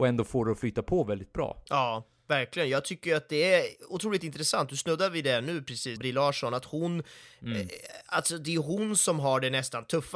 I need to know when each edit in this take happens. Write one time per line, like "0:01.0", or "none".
0:06.0